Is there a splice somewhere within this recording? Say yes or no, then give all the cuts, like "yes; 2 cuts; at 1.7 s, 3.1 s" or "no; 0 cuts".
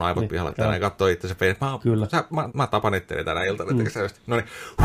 yes; 1 cut; at 2.5 s